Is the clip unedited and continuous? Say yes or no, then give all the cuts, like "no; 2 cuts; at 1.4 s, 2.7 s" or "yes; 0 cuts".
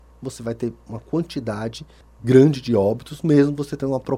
yes; 0 cuts